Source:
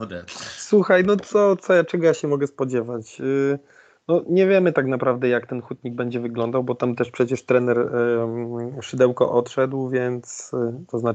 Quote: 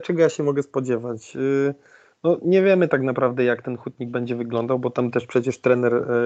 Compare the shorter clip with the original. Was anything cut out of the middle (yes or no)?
no